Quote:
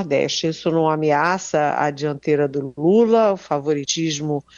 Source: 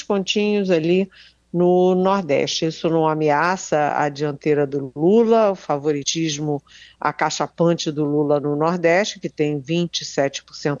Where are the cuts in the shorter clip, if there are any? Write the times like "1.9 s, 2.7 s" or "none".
none